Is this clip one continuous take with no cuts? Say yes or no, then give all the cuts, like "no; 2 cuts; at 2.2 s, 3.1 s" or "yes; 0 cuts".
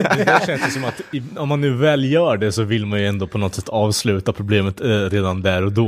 yes; 0 cuts